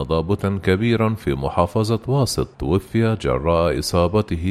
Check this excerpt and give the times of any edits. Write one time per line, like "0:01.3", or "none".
0:02.5